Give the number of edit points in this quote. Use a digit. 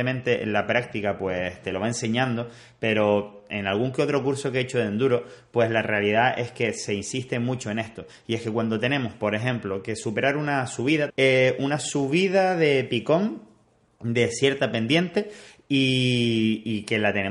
1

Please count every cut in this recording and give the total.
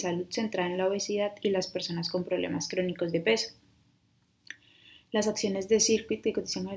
0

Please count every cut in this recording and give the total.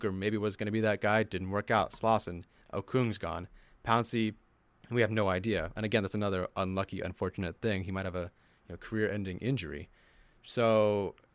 0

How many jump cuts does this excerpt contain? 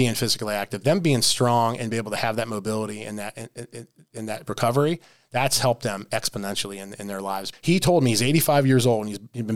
1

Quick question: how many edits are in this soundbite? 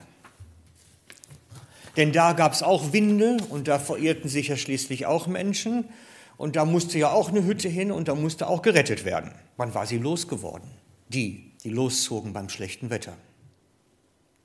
2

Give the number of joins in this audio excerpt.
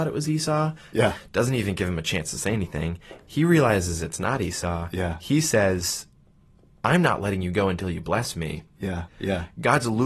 2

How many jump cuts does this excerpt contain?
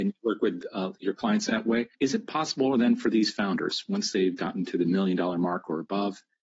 1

